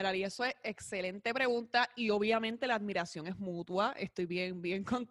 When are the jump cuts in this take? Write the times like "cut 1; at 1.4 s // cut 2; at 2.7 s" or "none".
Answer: none